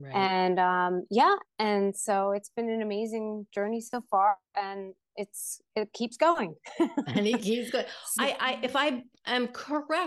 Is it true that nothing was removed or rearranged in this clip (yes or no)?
no